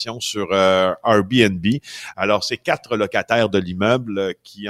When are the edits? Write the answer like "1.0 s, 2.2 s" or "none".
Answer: none